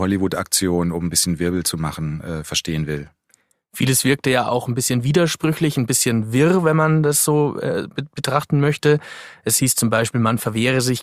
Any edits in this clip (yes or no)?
no